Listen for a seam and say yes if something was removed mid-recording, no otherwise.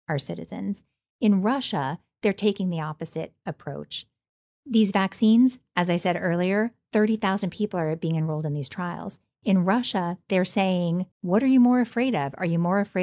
yes